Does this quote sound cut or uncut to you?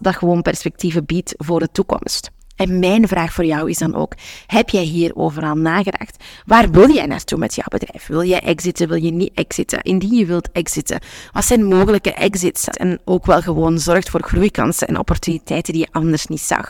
cut